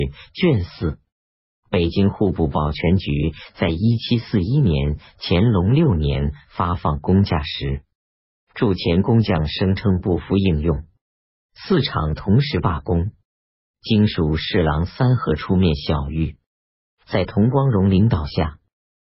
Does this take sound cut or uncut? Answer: uncut